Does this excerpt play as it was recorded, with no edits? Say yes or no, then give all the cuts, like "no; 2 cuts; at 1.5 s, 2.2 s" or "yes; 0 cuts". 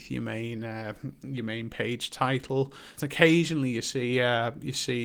no; 1 cut; at 3.0 s